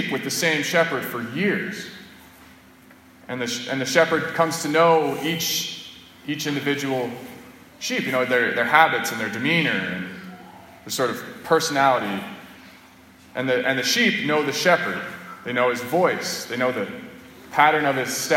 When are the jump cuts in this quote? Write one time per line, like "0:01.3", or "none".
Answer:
none